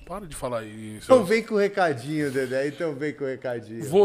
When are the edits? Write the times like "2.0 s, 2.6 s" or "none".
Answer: 1.1 s